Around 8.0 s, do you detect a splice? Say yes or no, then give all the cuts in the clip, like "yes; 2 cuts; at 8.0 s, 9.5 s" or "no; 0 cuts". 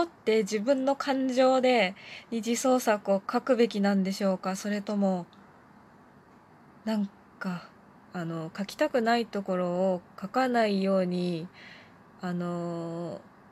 yes; 1 cut; at 8.0 s